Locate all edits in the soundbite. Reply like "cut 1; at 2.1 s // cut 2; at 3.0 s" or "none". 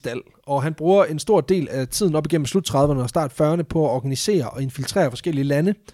none